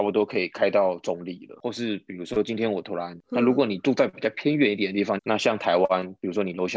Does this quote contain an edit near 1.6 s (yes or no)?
no